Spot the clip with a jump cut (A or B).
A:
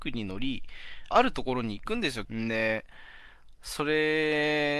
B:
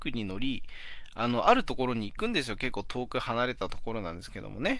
A